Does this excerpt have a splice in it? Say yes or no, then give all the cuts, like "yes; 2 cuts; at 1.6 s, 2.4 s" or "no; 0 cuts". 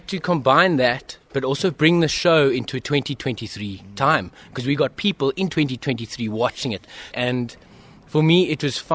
yes; 1 cut; at 7.1 s